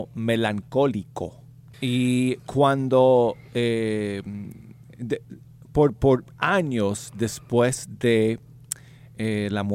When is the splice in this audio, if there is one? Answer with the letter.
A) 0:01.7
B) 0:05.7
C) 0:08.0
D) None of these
A